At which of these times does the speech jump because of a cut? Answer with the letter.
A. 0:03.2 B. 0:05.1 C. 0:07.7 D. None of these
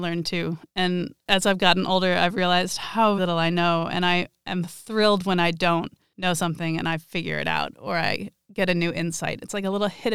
A